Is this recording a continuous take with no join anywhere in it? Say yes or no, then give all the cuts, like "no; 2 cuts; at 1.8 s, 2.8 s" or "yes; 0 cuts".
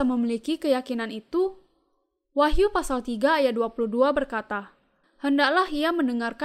no; 1 cut; at 5.0 s